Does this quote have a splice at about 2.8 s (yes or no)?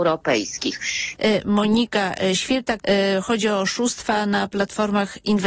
yes